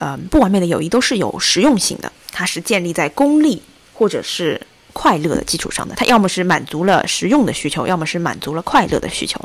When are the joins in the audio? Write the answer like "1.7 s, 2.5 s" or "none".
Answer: none